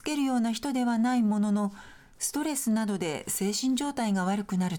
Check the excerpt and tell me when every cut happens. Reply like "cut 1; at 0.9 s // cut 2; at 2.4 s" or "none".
none